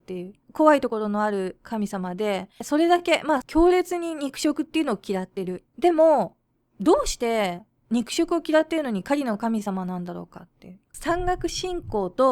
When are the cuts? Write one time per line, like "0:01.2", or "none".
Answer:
0:10.9